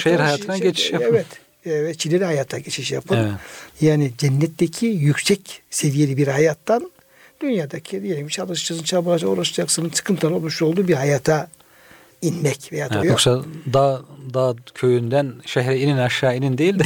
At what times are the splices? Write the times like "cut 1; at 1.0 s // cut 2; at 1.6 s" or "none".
cut 1; at 3.7 s // cut 2; at 13.0 s

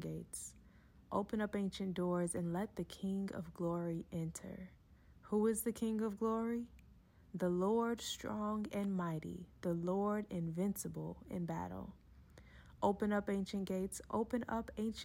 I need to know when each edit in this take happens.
none

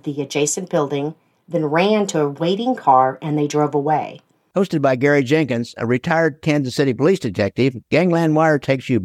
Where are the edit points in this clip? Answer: cut 1; at 4.5 s

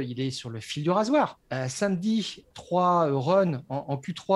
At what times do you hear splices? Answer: cut 1; at 1.4 s // cut 2; at 2.5 s

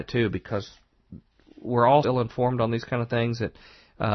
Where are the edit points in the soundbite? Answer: cut 1; at 2.0 s

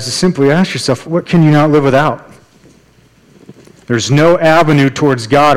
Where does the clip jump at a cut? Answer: cut 1; at 1.0 s // cut 2; at 3.8 s

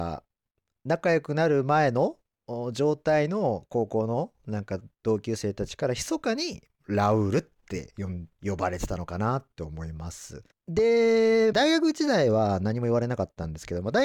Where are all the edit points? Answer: cut 1; at 8.3 s // cut 2; at 10.5 s // cut 3; at 11.5 s

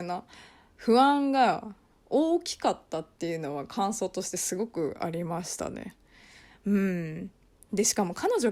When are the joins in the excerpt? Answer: none

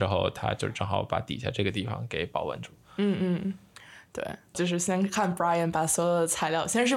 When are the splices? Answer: cut 1; at 4.5 s

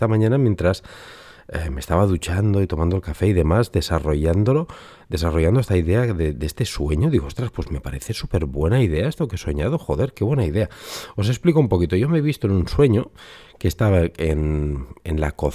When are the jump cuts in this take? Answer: none

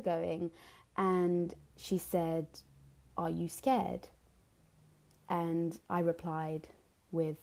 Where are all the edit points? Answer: none

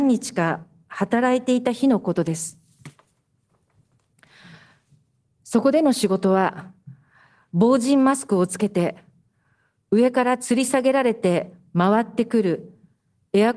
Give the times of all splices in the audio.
none

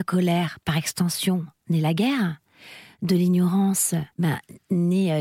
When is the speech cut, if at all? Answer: cut 1; at 4.1 s

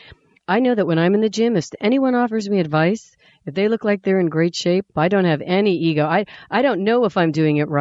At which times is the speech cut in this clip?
cut 1; at 4.9 s

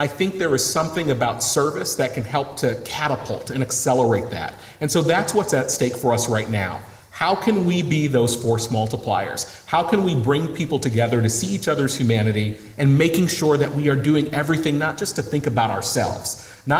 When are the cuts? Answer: none

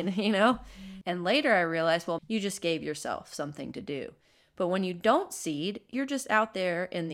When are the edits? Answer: cut 1; at 1.0 s // cut 2; at 2.2 s

